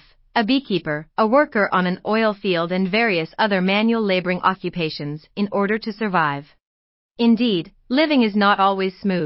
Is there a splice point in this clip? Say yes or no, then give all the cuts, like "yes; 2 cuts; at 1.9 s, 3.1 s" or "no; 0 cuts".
yes; 1 cut; at 7.1 s